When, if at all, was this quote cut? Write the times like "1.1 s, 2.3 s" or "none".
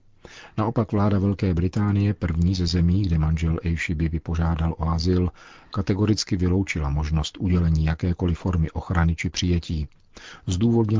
none